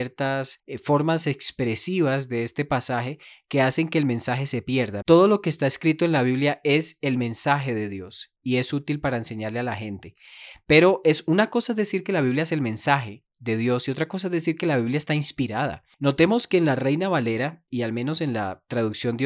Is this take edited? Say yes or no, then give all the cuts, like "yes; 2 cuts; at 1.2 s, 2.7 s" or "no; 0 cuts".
yes; 1 cut; at 5.0 s